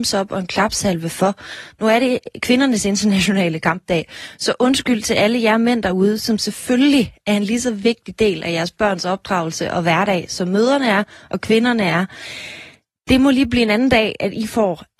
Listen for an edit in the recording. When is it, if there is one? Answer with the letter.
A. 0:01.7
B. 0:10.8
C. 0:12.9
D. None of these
A